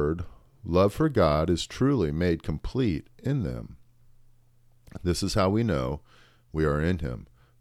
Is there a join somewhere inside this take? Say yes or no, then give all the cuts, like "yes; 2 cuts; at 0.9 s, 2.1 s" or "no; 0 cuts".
no; 0 cuts